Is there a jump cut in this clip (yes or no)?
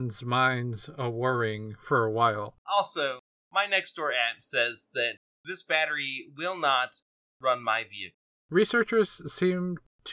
yes